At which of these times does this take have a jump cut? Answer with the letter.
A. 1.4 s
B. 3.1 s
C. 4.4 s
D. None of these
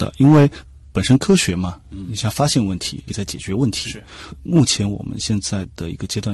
B